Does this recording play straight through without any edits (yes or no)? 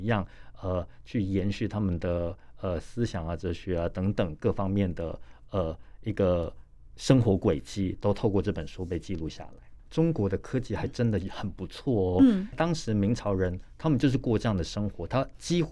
no